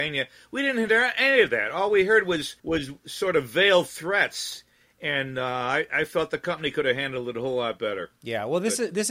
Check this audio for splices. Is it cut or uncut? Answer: cut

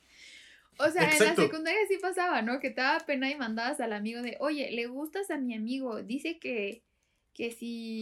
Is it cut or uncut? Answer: uncut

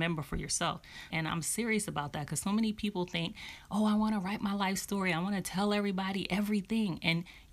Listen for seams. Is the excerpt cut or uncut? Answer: cut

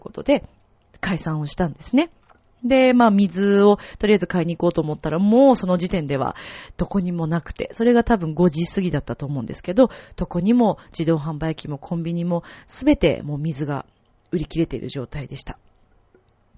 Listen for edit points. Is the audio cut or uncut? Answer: uncut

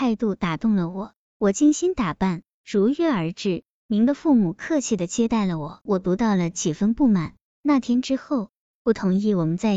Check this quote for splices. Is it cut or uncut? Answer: cut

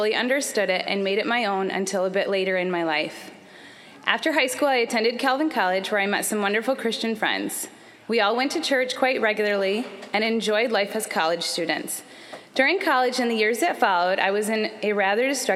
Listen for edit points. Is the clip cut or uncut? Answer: uncut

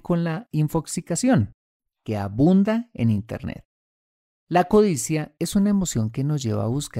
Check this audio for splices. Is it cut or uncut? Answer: cut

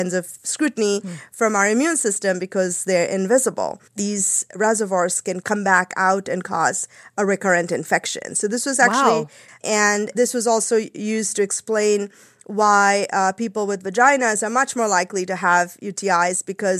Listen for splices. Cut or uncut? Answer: cut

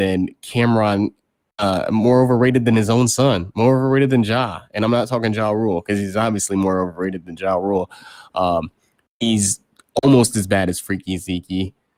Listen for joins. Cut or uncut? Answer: uncut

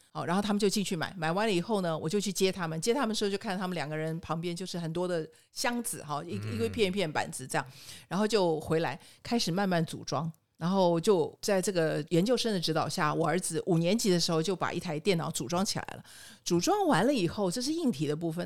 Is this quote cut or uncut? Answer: uncut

